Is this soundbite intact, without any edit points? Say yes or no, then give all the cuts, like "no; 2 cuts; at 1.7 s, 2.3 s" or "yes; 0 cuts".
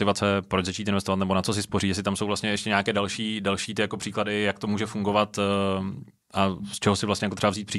yes; 0 cuts